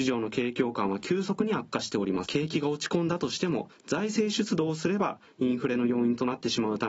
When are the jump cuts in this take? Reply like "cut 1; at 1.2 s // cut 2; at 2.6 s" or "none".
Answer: cut 1; at 2.3 s